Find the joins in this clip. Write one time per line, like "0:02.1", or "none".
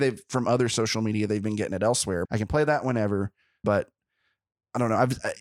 0:02.3
0:03.6